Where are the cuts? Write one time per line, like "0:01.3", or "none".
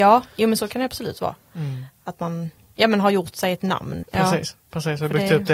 0:04.0